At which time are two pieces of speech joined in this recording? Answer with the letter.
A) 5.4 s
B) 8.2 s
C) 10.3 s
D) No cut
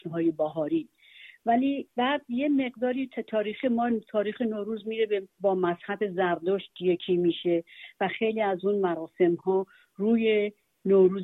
A